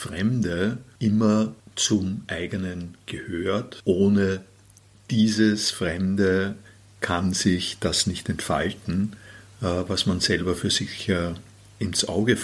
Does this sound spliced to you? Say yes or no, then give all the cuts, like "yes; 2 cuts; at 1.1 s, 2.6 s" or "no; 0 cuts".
no; 0 cuts